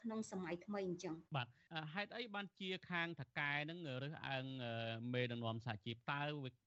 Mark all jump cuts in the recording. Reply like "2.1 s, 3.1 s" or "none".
1.3 s